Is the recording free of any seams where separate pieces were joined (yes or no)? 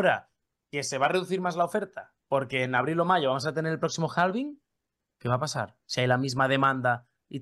yes